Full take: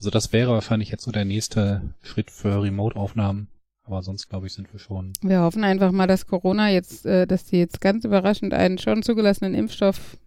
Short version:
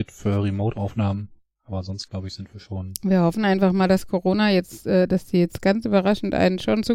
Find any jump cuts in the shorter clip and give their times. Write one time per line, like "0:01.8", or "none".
none